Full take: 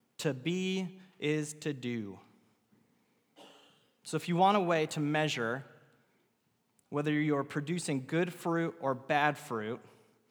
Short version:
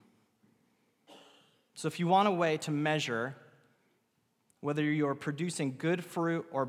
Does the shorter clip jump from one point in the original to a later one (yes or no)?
no